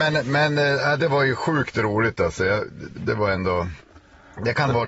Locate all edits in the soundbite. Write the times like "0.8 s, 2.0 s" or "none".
3.0 s